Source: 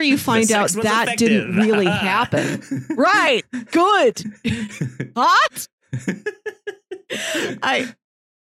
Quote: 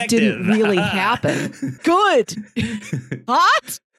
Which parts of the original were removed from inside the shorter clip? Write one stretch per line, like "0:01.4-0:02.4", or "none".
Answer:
0:02.9-0:03.7